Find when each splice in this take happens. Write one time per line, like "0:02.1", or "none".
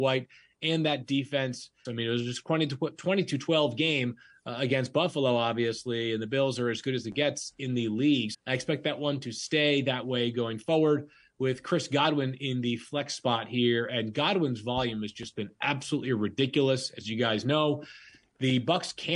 0:01.8
0:08.3